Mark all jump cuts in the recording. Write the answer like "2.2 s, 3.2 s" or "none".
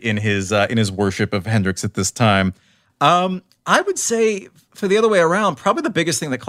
none